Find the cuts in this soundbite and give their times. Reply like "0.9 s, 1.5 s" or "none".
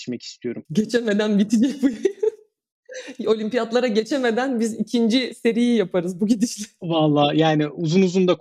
none